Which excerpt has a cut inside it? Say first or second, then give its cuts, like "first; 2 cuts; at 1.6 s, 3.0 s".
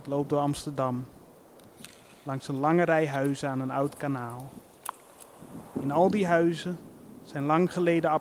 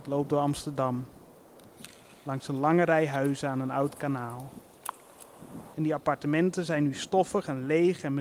second; 1 cut; at 5.7 s